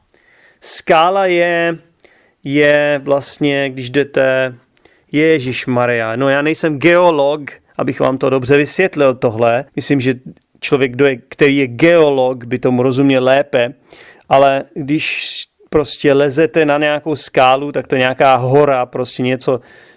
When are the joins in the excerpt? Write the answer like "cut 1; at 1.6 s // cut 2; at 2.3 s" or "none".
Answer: cut 1; at 9.7 s